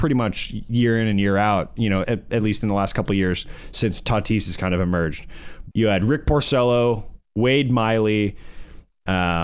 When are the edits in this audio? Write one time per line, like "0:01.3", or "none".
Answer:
0:02.0
0:05.7